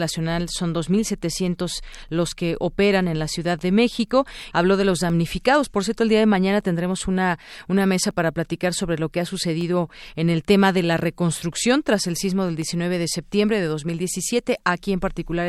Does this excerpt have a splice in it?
yes; 1 cut; at 4.5 s

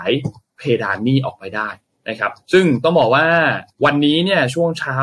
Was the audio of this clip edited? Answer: yes; 1 cut; at 3.7 s

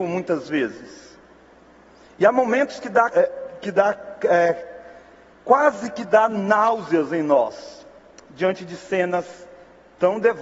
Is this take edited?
yes; 1 cut; at 3.1 s

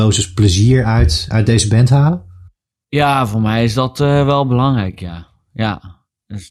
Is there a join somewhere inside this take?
no; 0 cuts

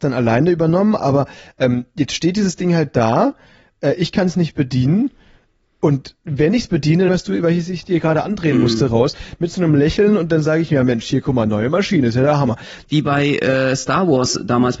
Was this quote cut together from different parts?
yes; 2 cuts; at 7.1 s, 12.8 s

